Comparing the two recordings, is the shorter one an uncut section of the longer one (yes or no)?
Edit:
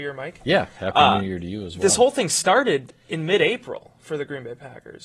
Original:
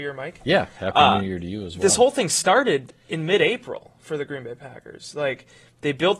yes